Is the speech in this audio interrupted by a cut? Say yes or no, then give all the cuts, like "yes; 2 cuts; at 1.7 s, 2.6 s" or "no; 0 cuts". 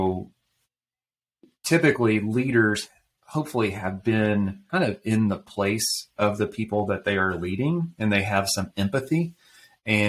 yes; 1 cut; at 4.7 s